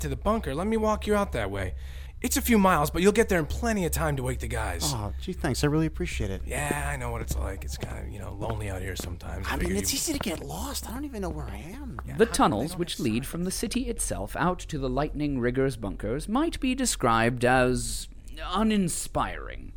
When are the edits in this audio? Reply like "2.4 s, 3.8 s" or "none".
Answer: none